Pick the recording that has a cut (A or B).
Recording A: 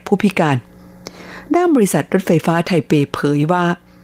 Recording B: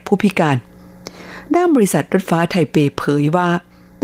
B